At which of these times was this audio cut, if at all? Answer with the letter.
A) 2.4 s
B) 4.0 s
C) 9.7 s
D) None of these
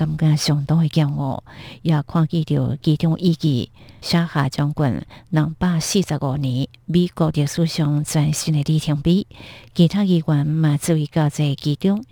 B